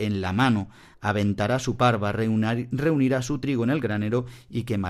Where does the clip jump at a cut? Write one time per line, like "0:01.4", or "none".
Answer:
none